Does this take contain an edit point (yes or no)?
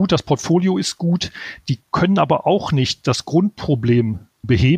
no